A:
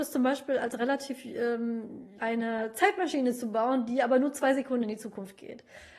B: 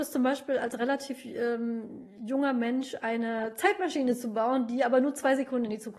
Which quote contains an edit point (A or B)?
A